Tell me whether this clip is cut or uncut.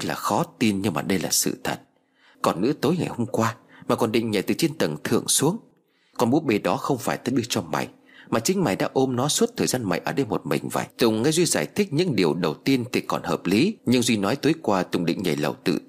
cut